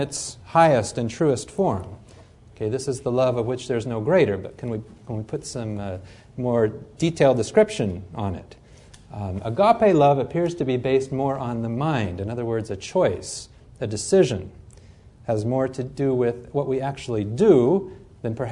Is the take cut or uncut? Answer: uncut